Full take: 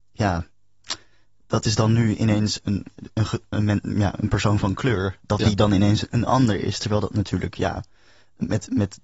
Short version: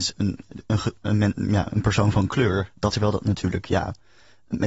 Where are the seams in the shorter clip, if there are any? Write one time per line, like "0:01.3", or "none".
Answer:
0:02.9